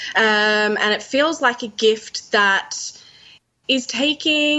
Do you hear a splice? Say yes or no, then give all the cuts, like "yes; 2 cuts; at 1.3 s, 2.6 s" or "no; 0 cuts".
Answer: no; 0 cuts